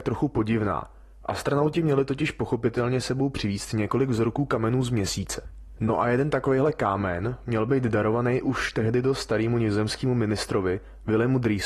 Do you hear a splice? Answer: no; 0 cuts

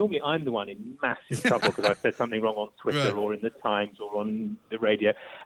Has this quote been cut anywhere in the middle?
no; 0 cuts

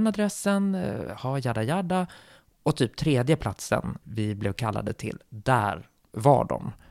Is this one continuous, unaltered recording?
no; 1 cut; at 4.0 s

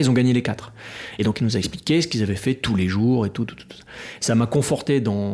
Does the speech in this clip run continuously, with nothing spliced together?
yes; 0 cuts

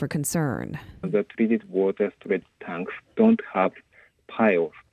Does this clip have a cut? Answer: yes; 1 cut; at 1.0 s

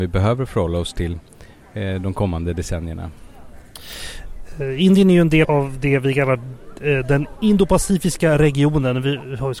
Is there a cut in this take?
yes; 1 cut; at 5.4 s

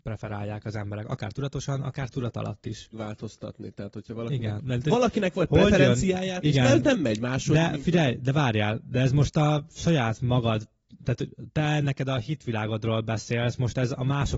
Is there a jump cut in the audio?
yes; 3 cuts; at 2.9 s, 4.6 s, 6.4 s

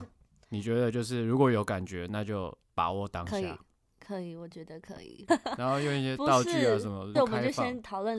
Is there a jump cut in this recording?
yes; 2 cuts; at 5.3 s, 7.1 s

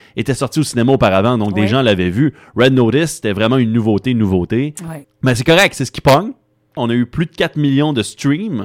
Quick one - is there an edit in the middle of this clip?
yes; 2 cuts; at 5.0 s, 6.8 s

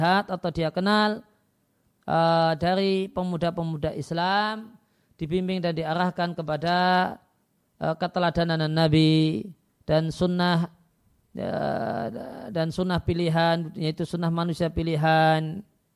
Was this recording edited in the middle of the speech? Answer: no; 0 cuts

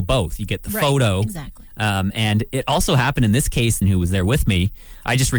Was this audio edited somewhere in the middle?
yes; 2 cuts; at 1.7 s, 3.8 s

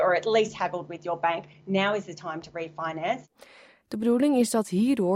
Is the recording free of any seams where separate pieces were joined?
no; 1 cut; at 3.8 s

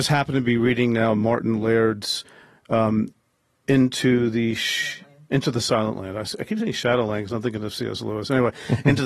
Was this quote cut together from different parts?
no; 0 cuts

